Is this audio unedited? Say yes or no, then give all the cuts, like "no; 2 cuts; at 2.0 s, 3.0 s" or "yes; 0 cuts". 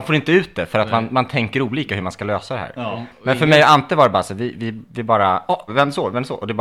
no; 1 cut; at 5.7 s